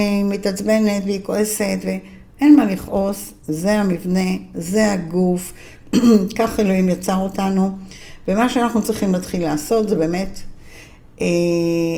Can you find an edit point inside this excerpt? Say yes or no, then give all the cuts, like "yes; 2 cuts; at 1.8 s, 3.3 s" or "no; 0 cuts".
no; 0 cuts